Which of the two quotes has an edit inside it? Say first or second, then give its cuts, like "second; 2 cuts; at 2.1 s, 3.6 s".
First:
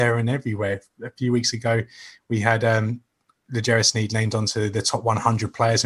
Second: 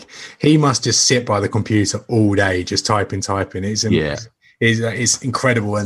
second; 1 cut; at 3.2 s